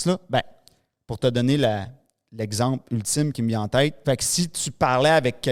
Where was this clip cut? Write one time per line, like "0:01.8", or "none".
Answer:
0:04.0